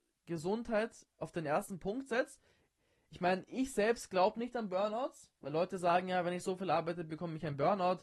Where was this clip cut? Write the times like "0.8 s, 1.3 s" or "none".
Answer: 1.1 s